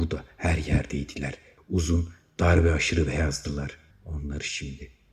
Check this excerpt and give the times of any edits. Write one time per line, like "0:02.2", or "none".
0:01.6
0:03.9